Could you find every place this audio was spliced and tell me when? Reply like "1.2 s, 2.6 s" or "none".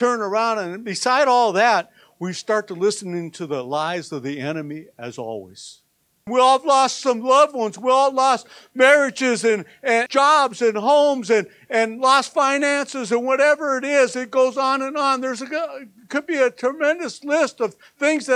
6.3 s, 10.1 s